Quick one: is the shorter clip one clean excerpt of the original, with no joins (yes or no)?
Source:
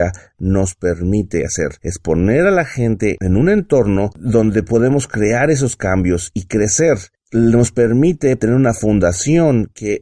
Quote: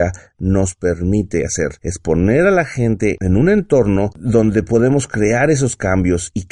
yes